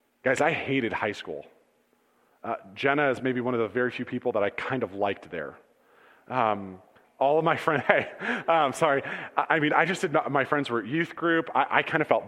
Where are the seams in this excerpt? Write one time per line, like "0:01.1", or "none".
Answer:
0:08.4